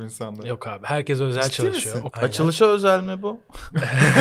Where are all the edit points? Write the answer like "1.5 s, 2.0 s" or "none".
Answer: 2.1 s